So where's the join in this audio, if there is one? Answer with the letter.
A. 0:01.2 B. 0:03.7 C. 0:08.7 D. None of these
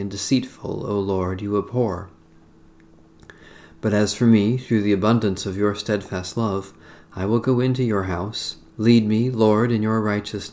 C